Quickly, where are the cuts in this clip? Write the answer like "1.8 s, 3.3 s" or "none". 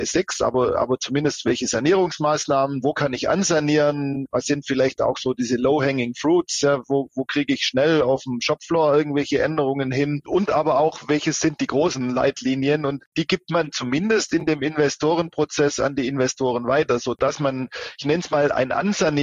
none